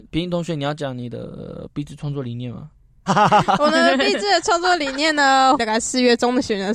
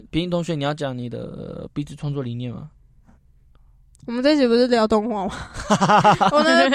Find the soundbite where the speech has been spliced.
first; 2 cuts; at 3.1 s, 5.6 s

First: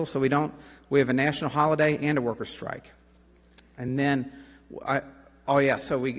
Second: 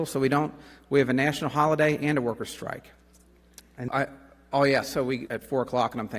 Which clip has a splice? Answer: second; 2 cuts; at 3.9 s, 5.3 s

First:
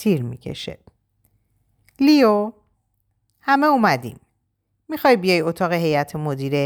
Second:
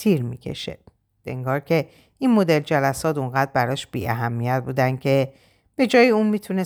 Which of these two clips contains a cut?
second; 1 cut; at 1.2 s

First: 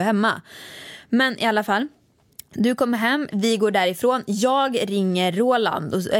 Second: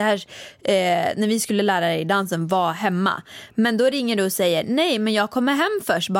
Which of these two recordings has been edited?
first; 1 cut; at 3.3 s

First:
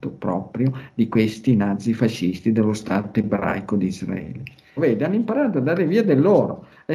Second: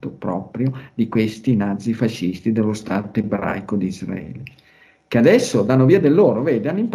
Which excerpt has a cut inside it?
first; 1 cut; at 4.8 s

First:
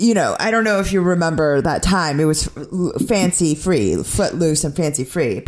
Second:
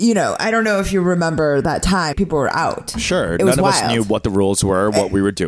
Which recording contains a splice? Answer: second; 1 cut; at 2.1 s

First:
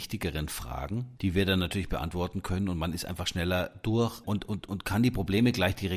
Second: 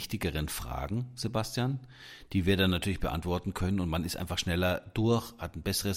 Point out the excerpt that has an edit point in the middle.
first; 2 cuts; at 1.2 s, 4.2 s

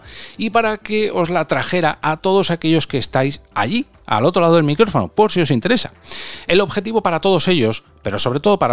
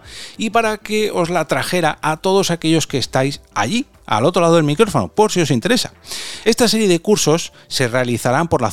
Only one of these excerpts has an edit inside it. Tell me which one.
first; 1 cut; at 6.5 s

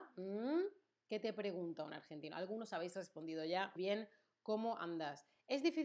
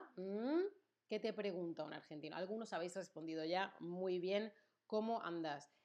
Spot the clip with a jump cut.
first; 1 cut; at 3.8 s

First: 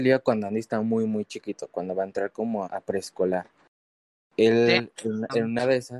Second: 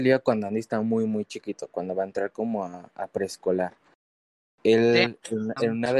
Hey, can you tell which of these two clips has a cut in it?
first; 1 cut; at 2.6 s

